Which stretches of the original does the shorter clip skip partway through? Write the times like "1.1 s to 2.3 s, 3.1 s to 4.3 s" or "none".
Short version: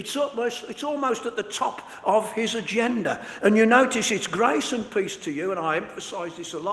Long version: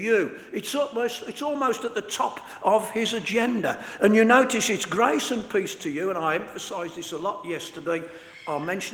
none